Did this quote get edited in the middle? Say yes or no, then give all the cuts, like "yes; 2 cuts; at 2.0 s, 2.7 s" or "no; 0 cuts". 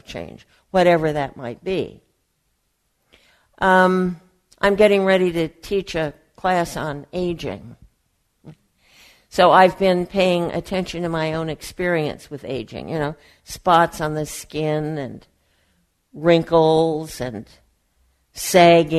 no; 0 cuts